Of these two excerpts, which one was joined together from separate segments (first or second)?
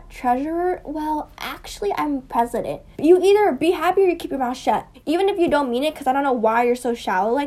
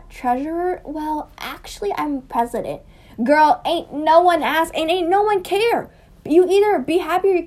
first